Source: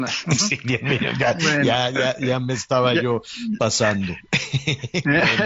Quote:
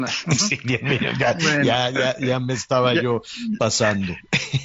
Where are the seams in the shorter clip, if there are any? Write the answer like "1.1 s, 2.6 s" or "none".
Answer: none